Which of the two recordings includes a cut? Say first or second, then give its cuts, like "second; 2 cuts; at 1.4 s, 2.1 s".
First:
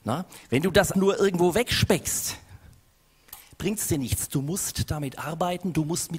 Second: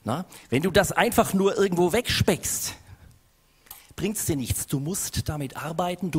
first; 1 cut; at 0.9 s